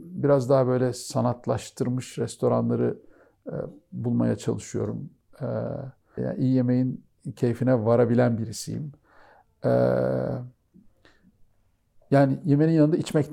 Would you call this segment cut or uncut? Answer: cut